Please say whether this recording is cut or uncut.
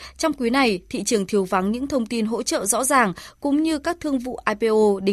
uncut